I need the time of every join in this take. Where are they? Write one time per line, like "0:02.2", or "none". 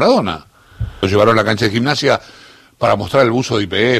0:01.0